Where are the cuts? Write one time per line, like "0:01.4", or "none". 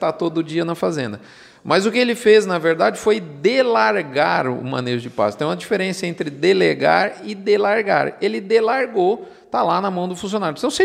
none